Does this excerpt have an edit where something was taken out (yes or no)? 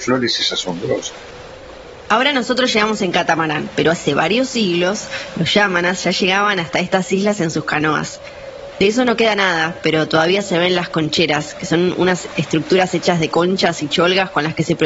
yes